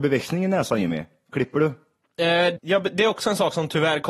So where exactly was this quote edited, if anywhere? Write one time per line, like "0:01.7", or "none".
0:02.6

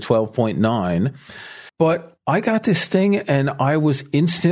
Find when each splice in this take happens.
0:01.7

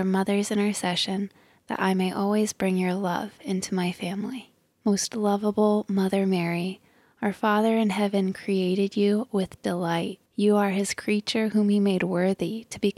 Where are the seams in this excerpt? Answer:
0:04.7
0:10.3

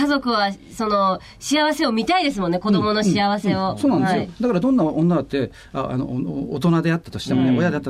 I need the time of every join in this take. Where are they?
none

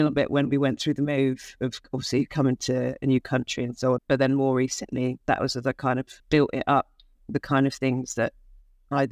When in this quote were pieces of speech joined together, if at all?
0:04.0
0:06.2

